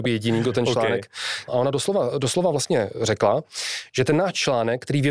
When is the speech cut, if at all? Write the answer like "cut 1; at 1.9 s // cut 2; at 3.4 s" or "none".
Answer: cut 1; at 1.5 s